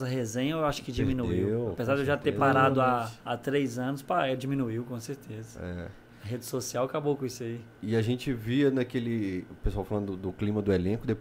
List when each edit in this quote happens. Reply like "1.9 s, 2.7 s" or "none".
3.2 s